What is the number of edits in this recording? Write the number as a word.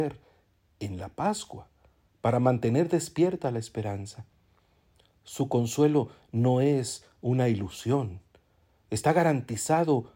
zero